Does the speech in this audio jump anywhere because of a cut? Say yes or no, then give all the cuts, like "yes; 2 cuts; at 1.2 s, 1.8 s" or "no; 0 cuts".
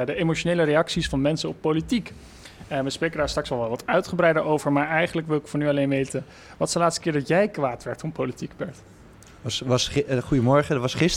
no; 0 cuts